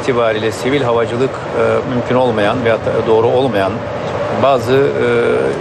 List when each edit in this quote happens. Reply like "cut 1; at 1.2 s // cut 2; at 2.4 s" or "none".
cut 1; at 1.8 s